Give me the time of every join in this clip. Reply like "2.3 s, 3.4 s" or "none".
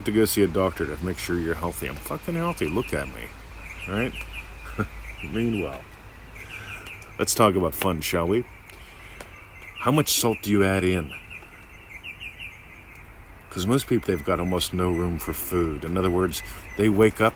14.0 s